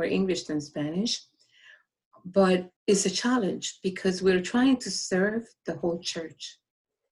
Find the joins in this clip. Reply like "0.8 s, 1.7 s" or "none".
2.8 s